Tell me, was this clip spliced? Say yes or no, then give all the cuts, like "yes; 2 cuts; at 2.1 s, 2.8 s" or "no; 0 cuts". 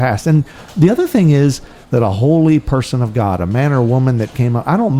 yes; 1 cut; at 1.8 s